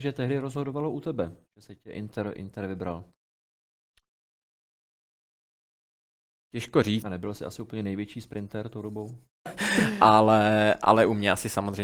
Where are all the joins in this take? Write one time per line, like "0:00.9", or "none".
0:07.0
0:09.5